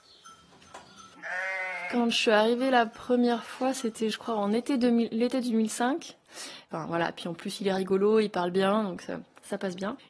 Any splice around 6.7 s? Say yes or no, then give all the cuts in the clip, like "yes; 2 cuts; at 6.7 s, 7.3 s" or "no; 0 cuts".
yes; 1 cut; at 6.7 s